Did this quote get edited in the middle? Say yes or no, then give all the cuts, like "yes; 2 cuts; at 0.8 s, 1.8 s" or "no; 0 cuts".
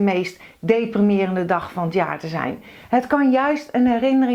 no; 0 cuts